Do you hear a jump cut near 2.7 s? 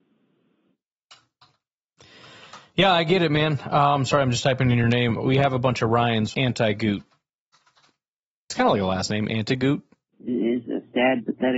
no; 2 cuts; at 6.3 s, 10.1 s

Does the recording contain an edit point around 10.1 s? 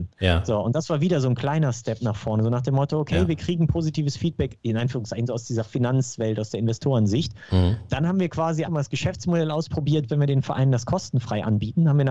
yes; 2 cuts; at 8.6 s, 10.1 s

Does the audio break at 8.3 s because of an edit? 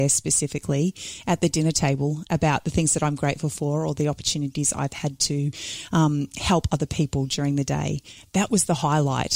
no; 0 cuts

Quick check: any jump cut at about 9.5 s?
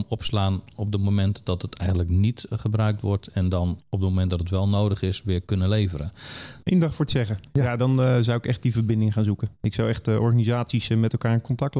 no; 1 cut; at 6.6 s

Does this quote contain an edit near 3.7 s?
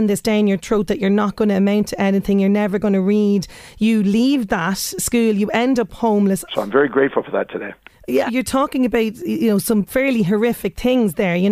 no; 2 cuts; at 6.5 s, 8.3 s

